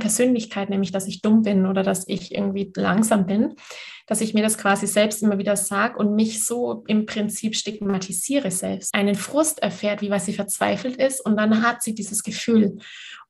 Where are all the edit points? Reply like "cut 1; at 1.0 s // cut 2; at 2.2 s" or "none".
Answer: cut 1; at 8.9 s // cut 2; at 10.0 s